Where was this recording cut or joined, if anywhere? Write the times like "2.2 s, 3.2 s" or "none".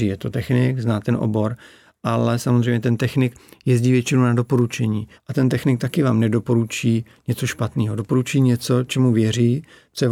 5.1 s